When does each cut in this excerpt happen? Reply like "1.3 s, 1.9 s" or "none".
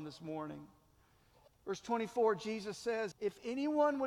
1.5 s, 3.1 s